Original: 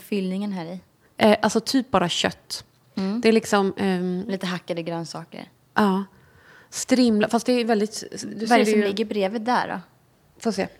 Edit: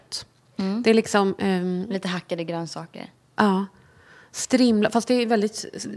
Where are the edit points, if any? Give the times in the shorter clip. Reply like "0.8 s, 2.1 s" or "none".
none